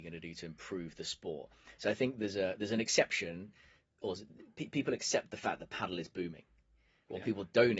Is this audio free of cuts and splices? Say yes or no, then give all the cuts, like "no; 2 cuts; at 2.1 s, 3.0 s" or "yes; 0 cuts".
yes; 0 cuts